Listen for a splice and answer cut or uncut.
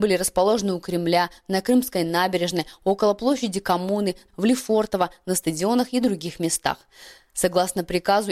cut